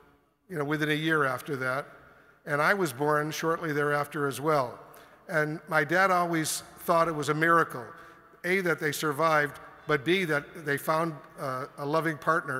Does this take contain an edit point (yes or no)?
no